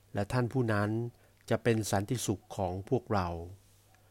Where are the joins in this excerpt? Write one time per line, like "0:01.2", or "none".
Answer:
none